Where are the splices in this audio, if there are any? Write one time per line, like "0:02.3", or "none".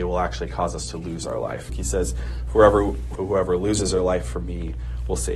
0:01.7
0:03.2